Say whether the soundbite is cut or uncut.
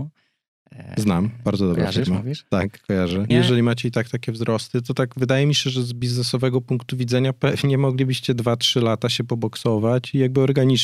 cut